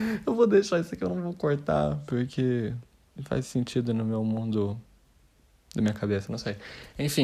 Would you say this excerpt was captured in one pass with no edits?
no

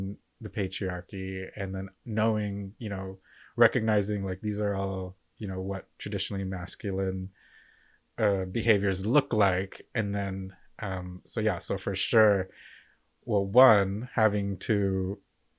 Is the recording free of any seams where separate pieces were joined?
yes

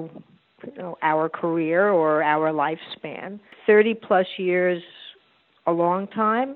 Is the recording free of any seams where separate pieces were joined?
yes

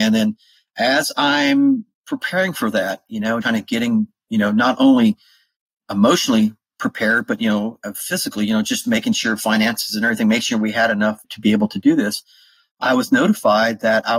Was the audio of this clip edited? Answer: yes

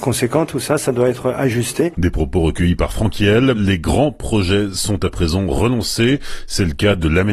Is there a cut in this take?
yes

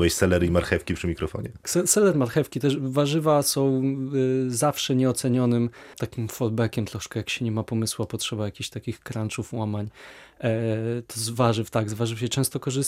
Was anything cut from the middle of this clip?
yes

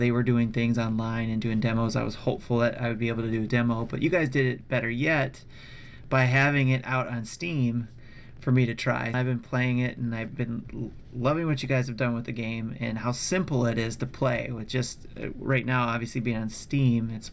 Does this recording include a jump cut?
yes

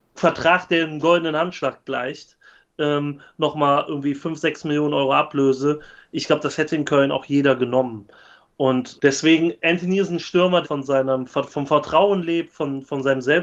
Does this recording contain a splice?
yes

